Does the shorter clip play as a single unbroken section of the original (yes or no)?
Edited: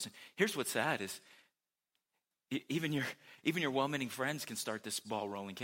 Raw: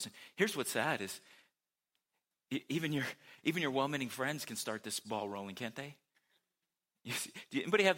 yes